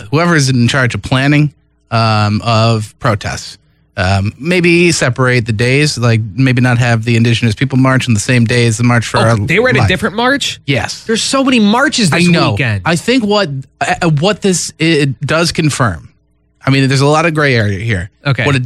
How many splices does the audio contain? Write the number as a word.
zero